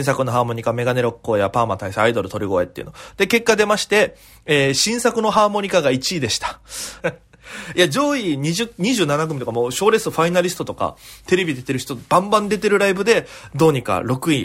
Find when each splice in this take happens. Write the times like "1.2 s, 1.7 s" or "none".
7.0 s